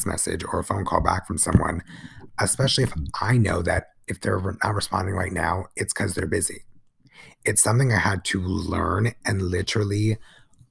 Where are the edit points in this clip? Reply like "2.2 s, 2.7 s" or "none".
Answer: none